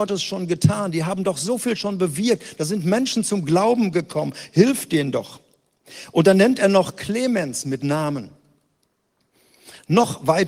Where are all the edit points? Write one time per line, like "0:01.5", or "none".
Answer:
none